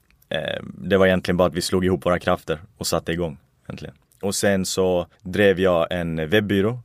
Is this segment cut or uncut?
cut